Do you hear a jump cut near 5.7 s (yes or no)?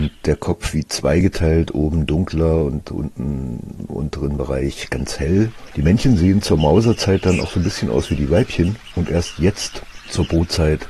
yes